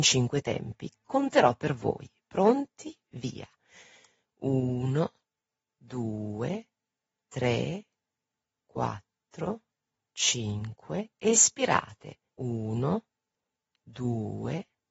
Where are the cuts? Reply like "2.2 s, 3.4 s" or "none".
12.3 s